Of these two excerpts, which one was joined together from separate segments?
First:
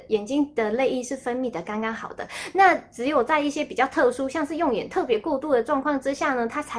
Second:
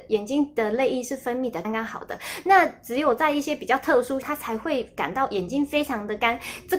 second; 2 cuts; at 1.6 s, 4.2 s

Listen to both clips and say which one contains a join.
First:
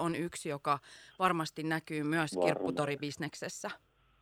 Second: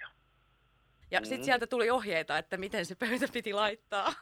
second; 1 cut; at 1.0 s

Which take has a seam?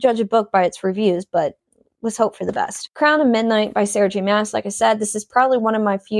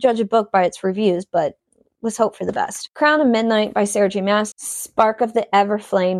second; 1 cut; at 4.5 s

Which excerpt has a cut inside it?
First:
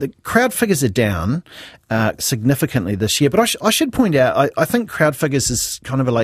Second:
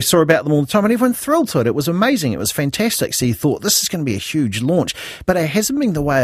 first; 1 cut; at 2.2 s

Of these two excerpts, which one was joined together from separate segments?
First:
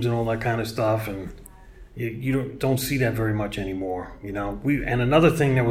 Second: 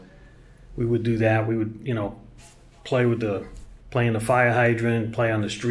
second; 1 cut; at 3.8 s

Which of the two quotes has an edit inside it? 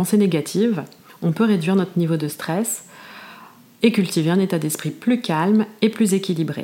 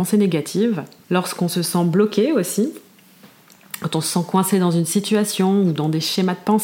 second; 1 cut; at 1.0 s

